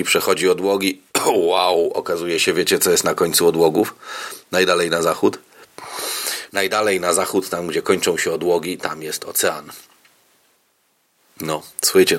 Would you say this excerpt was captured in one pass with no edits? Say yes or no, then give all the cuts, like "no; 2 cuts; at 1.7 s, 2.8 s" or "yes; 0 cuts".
no; 1 cut; at 6.5 s